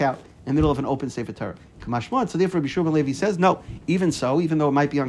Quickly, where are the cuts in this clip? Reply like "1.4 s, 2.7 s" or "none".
none